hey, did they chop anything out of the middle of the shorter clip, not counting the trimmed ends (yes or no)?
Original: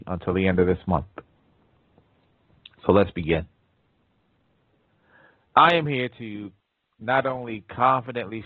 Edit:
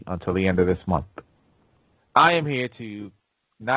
yes